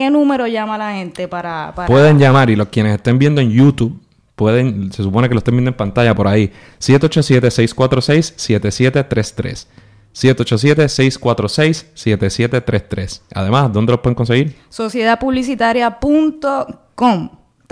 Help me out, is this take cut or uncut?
uncut